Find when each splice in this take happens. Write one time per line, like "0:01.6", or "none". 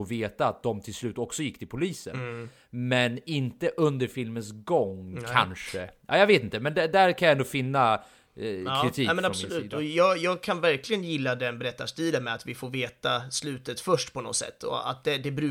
none